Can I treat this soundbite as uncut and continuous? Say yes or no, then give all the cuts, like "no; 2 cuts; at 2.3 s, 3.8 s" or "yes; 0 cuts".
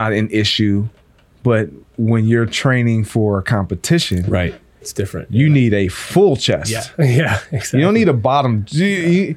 yes; 0 cuts